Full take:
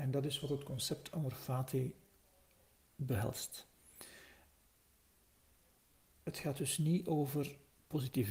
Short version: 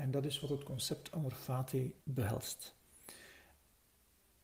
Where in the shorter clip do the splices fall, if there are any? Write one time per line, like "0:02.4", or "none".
0:02.0